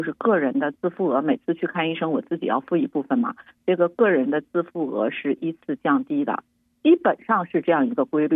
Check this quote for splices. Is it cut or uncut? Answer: uncut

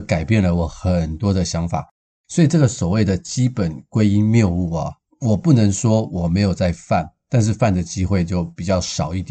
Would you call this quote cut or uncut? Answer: uncut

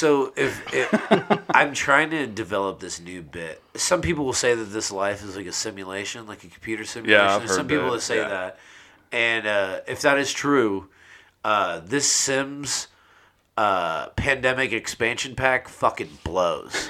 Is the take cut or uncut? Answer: cut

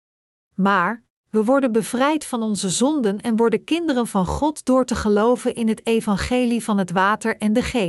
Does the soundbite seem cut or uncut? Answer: uncut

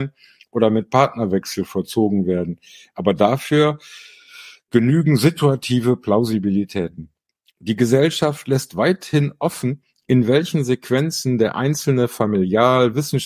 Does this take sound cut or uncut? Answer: uncut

